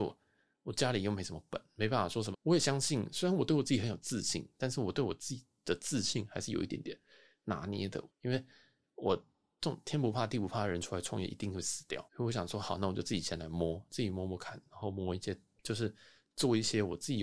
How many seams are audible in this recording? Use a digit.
3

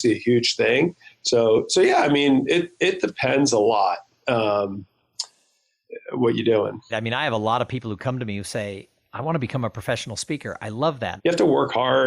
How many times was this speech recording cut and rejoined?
2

